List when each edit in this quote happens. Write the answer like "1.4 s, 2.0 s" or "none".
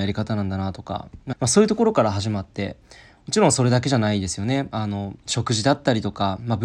1.3 s